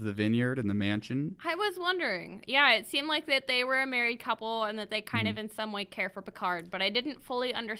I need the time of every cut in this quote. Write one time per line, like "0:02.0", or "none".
none